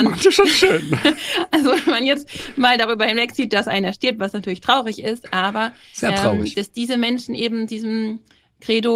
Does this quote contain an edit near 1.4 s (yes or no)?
no